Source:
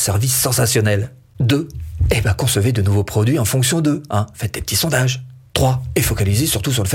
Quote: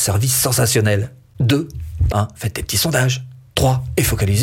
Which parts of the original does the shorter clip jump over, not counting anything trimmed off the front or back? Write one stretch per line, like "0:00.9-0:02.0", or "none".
0:02.1-0:04.1